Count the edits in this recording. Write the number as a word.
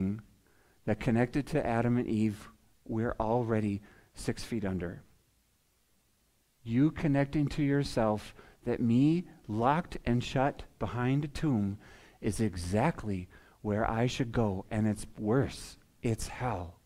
zero